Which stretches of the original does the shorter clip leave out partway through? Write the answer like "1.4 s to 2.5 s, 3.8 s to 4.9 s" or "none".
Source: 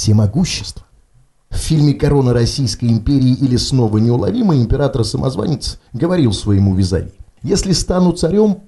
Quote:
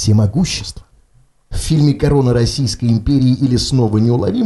none

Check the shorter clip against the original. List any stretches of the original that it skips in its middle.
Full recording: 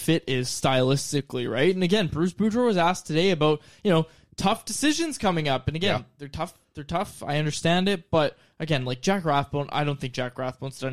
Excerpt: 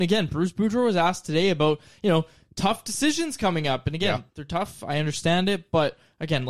6.1 s to 6.7 s

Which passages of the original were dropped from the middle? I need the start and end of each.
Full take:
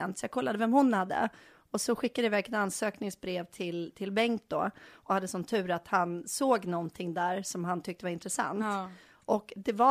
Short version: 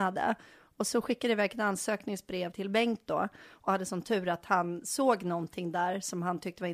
3.5 s to 3.9 s

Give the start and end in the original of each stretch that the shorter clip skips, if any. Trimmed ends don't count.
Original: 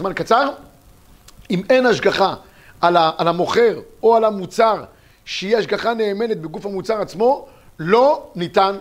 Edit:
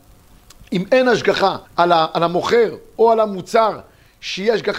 2.4 s to 2.7 s

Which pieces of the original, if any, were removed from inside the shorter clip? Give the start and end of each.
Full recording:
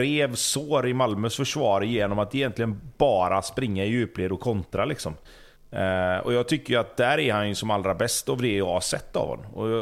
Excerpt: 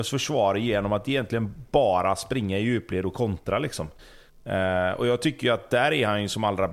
none

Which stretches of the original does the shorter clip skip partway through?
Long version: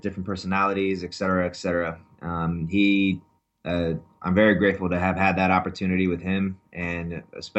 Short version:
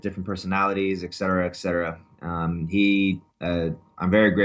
3.3 s to 3.5 s

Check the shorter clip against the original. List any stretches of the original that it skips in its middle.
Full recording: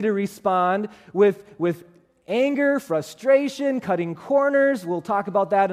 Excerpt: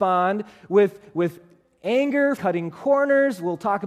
2.8 s to 3.8 s

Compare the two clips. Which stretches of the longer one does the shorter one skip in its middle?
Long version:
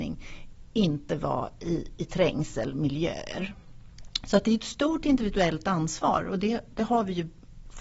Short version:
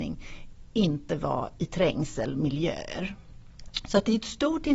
1.6 s to 2.0 s

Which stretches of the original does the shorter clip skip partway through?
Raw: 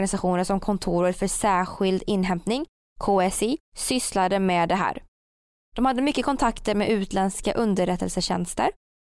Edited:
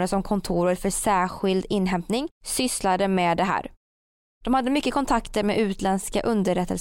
2.7 s to 3.7 s

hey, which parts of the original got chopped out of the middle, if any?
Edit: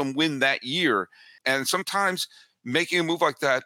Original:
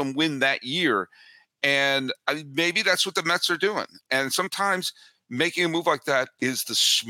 1.4 s to 4.0 s

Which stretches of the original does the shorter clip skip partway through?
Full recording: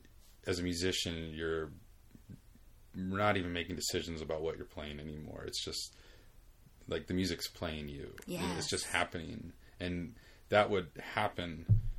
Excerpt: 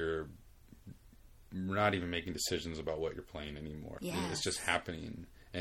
5.4 s to 8.2 s

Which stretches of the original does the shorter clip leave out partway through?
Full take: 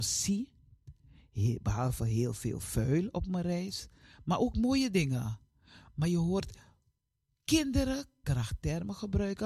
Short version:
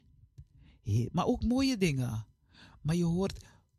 1.6 s to 4.2 s

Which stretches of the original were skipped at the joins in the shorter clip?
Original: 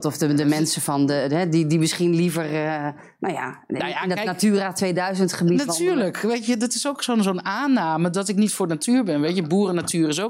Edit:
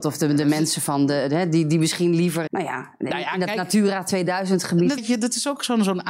2.5 s to 3.2 s, 5.7 s to 6.4 s

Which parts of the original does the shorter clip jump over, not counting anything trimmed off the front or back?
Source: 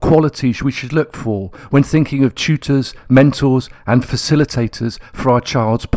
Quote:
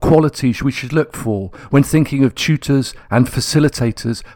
3.0 s to 3.8 s

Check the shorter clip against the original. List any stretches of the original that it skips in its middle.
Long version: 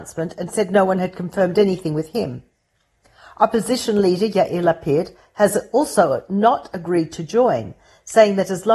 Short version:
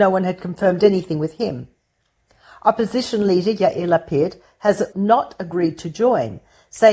5.7 s to 6.3 s

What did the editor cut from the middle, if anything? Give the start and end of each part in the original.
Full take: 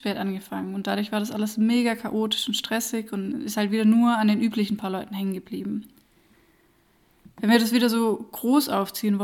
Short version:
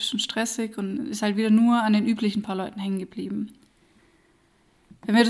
none

